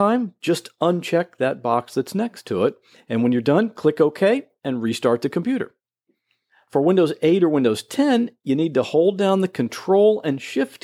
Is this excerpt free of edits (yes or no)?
yes